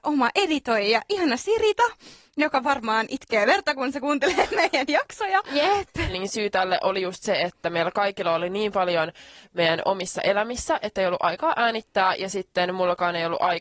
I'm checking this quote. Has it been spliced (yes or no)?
yes